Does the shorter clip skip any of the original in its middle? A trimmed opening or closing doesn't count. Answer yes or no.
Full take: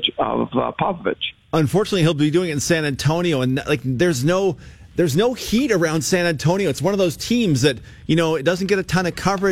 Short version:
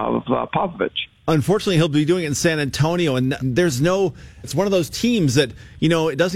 yes